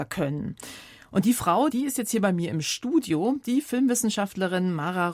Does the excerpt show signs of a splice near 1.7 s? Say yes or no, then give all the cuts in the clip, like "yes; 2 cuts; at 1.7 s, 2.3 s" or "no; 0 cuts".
yes; 1 cut; at 1.7 s